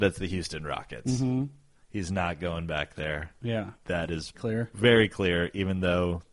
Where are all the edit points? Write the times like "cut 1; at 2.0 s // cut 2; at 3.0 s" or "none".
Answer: cut 1; at 4.3 s